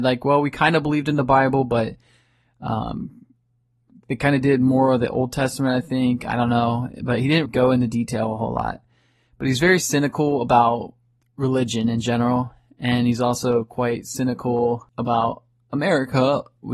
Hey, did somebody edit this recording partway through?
yes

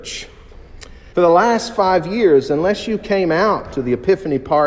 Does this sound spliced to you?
yes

